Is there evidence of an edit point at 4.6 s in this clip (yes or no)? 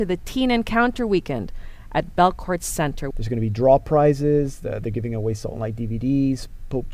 no